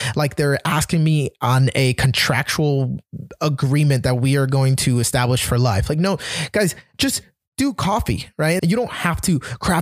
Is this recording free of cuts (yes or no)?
no